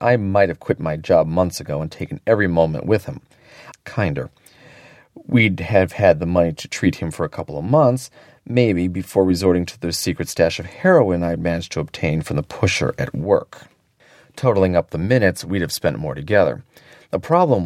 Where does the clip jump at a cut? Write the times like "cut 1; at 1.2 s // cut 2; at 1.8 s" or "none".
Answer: cut 1; at 3.7 s